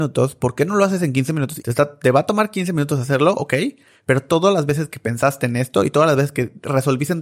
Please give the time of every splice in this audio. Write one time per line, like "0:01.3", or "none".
0:01.6